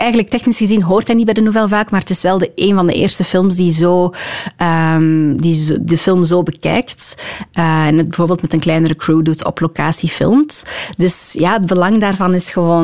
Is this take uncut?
yes; 0 cuts

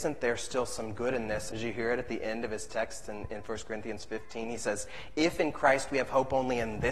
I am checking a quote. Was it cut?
yes; 1 cut; at 1.5 s

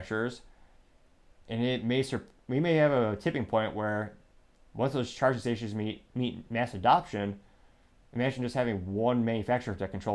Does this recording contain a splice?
no; 0 cuts

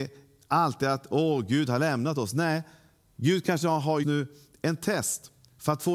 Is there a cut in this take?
yes; 1 cut; at 4.0 s

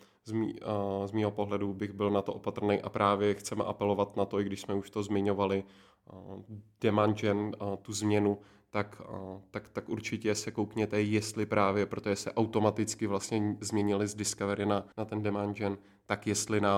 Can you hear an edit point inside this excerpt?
yes; 1 cut; at 14.9 s

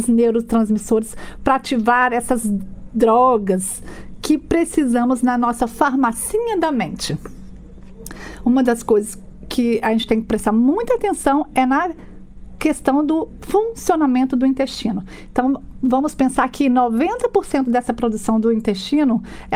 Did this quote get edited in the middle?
no; 0 cuts

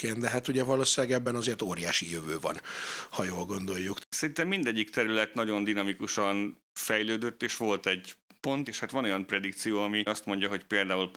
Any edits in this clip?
yes; 3 cuts; at 4.0 s, 7.4 s, 8.6 s

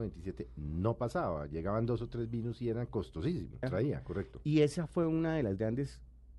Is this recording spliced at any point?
yes; 1 cut; at 3.6 s

